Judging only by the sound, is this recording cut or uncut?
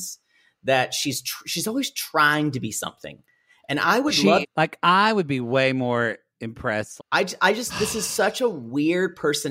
cut